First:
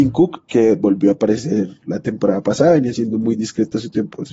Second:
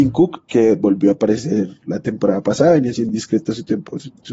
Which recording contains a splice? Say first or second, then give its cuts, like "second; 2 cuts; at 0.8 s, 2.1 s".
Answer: second; 1 cut; at 3.1 s